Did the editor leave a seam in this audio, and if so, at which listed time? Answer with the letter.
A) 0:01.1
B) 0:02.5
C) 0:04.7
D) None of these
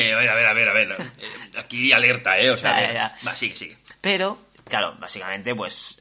C